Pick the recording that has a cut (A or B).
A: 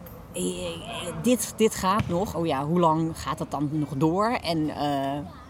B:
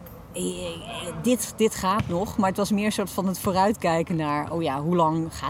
A